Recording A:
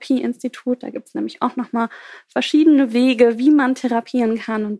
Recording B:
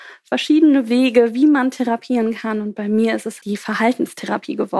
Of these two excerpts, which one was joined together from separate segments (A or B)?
B